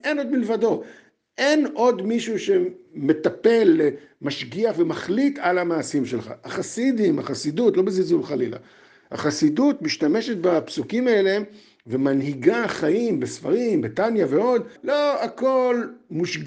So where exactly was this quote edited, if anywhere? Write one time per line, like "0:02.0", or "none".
0:14.8